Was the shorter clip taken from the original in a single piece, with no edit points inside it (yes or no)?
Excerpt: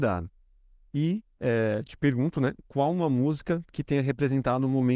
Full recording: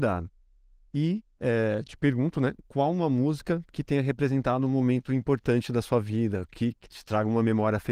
yes